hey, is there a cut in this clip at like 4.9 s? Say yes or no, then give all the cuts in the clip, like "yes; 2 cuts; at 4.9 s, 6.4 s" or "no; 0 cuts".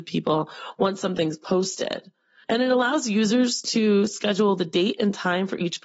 no; 1 cut; at 2.4 s